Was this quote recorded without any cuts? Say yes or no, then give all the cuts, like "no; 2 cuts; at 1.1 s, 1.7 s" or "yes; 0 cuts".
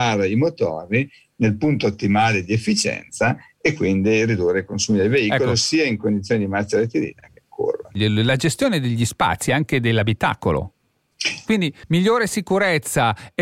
no; 2 cuts; at 7.9 s, 11.5 s